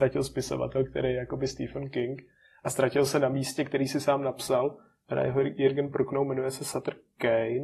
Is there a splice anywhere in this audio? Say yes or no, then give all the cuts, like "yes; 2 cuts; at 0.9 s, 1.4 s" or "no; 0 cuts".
no; 0 cuts